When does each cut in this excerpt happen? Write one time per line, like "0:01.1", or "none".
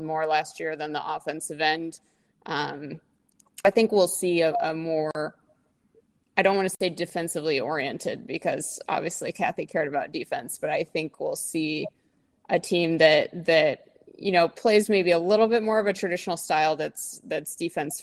0:03.6